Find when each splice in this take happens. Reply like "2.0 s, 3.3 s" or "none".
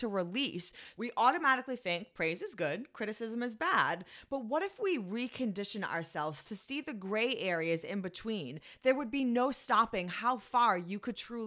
0.9 s